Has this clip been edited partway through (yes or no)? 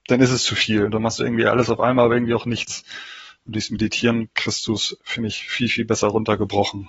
no